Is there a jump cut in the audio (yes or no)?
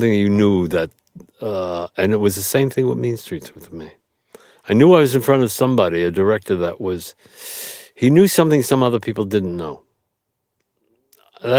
no